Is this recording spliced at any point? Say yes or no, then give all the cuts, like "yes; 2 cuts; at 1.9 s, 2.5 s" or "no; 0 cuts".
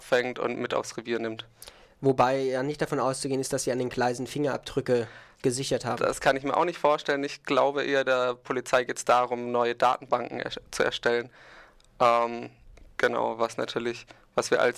no; 0 cuts